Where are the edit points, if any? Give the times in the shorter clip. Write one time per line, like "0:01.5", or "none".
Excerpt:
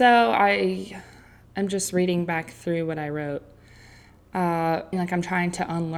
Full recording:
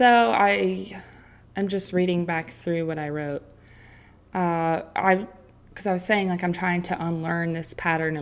0:04.9